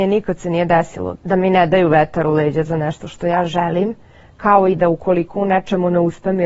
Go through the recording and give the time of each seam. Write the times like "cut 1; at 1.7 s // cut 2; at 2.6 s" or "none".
cut 1; at 1.2 s